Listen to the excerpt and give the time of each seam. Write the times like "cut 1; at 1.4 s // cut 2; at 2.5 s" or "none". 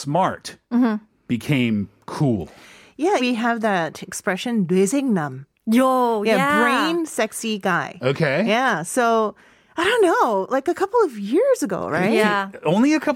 cut 1; at 3.2 s